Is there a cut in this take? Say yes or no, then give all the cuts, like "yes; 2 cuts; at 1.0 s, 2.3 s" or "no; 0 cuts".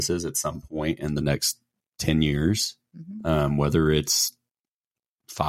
no; 0 cuts